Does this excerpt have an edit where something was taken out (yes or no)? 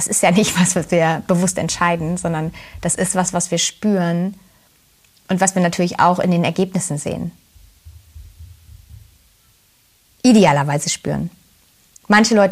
no